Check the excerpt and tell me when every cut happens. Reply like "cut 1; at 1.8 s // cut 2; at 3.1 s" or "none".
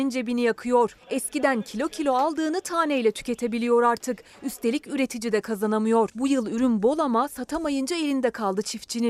none